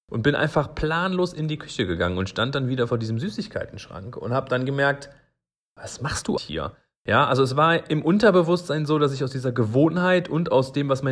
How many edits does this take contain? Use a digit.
1